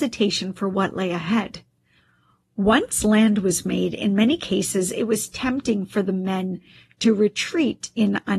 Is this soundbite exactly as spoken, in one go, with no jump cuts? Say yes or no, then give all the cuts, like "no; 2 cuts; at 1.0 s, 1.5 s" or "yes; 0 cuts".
yes; 0 cuts